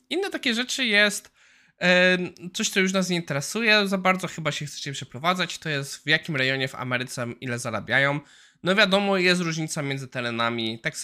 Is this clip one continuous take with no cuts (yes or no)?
yes